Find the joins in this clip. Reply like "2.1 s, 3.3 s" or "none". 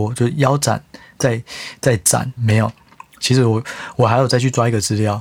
2.4 s